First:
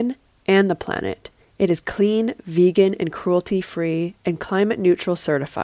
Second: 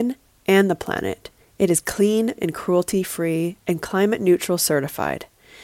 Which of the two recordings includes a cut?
second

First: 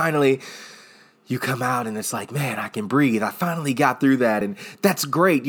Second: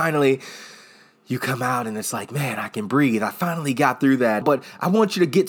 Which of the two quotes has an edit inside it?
second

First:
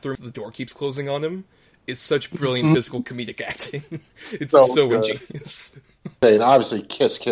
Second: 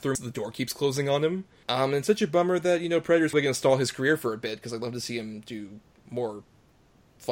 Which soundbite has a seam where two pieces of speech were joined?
second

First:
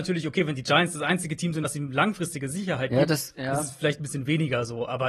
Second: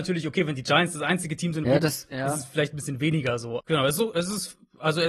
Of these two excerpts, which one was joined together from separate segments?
second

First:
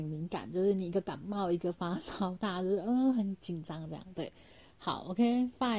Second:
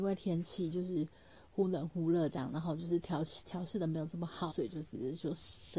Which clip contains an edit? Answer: second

